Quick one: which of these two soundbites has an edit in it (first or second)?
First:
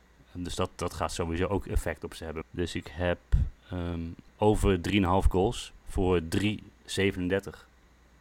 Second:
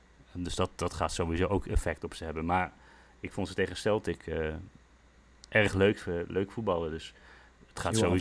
first